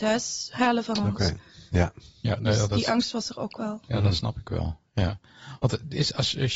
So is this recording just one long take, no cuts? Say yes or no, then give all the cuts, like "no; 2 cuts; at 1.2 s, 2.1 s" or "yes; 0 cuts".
yes; 0 cuts